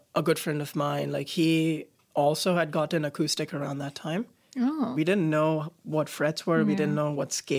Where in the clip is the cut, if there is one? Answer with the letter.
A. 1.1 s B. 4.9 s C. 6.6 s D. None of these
B